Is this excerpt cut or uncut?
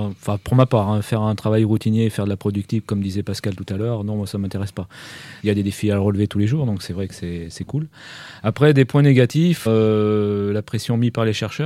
cut